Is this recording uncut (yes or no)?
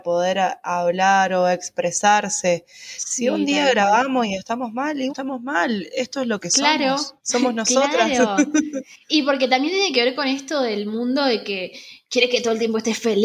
no